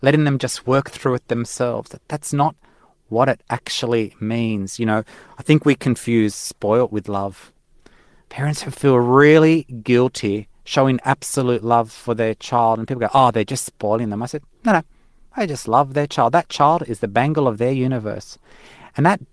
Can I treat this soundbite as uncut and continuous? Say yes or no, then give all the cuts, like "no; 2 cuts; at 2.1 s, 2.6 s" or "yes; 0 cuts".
yes; 0 cuts